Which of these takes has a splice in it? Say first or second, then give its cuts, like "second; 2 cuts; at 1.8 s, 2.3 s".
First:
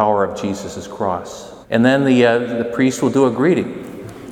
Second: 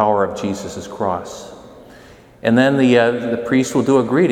first; 1 cut; at 1.6 s